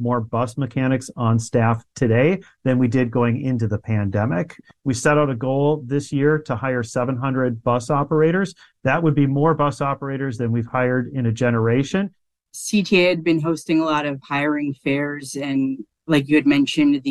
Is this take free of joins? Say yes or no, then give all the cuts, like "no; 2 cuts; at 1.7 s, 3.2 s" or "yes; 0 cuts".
yes; 0 cuts